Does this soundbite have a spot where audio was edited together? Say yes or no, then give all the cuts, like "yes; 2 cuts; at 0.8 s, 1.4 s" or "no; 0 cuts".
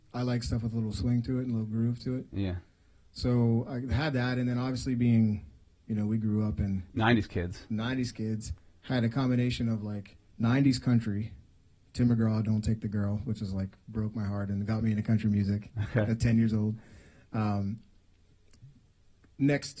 no; 0 cuts